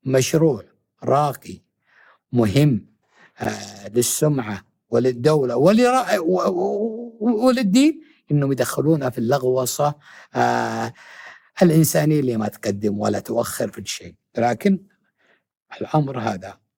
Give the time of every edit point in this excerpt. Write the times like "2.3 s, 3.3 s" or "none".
none